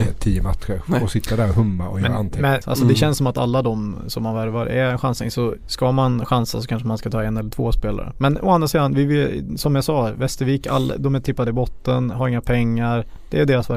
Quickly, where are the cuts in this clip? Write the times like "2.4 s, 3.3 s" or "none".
2.6 s

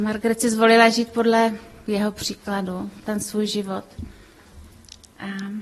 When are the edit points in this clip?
3.0 s

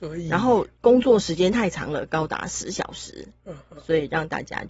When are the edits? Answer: none

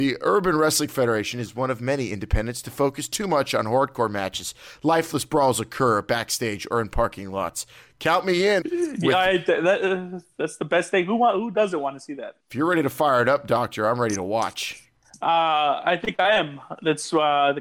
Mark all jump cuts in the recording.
8.6 s, 12.4 s

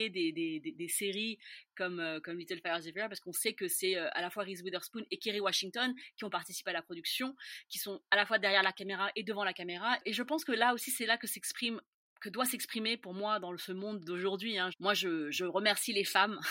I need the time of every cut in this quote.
14.7 s

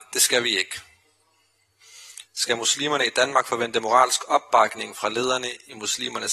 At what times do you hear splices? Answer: 2.3 s

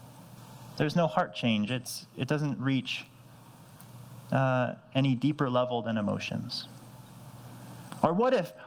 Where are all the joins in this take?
none

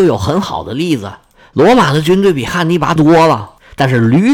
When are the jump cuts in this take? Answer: 3.0 s

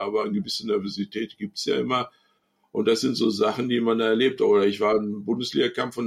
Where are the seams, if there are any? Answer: none

